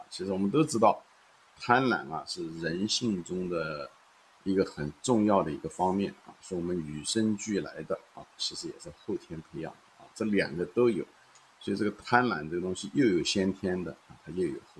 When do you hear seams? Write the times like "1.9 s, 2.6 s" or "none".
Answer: 8.4 s